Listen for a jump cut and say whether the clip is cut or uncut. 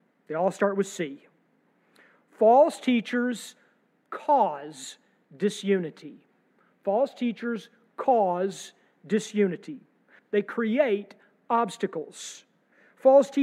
cut